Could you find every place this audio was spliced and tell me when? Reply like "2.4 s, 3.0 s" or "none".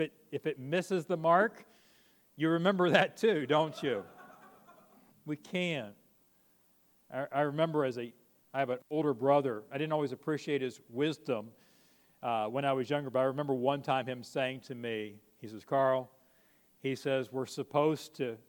5.1 s